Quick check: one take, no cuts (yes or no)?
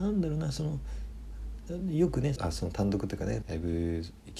no